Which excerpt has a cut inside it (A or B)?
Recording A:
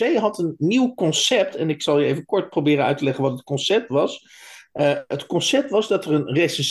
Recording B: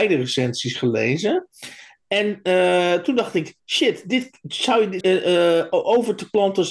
B